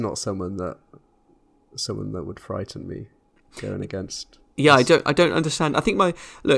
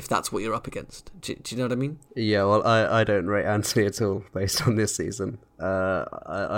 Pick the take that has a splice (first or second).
second